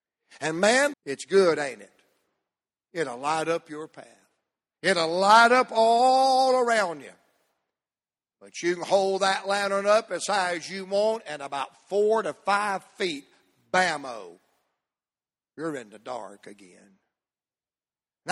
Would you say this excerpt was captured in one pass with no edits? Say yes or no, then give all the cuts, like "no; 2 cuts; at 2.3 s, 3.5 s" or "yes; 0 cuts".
no; 1 cut; at 0.9 s